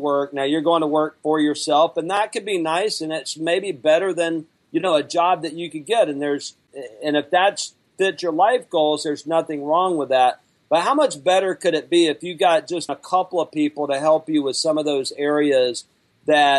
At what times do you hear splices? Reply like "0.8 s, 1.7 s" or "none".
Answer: 12.9 s